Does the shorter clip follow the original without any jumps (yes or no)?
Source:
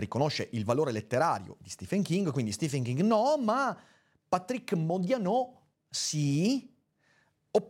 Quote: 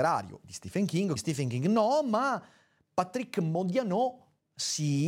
no